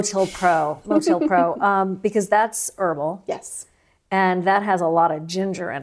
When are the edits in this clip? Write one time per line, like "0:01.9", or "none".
none